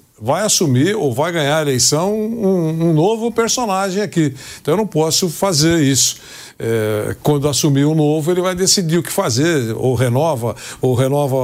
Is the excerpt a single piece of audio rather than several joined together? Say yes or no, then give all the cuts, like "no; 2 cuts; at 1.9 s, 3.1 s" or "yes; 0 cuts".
yes; 0 cuts